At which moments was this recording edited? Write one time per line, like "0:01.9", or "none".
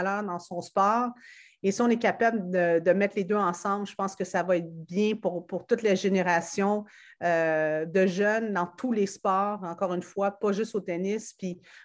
none